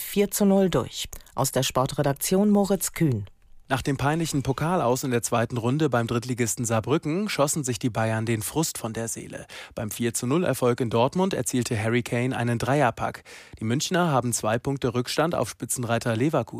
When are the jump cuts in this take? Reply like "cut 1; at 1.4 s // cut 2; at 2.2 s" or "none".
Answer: none